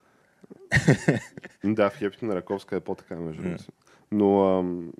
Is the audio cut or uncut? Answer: uncut